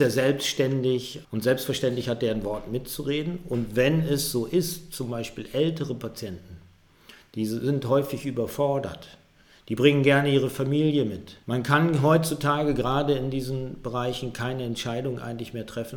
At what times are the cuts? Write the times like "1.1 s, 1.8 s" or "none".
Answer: 1.2 s, 11.4 s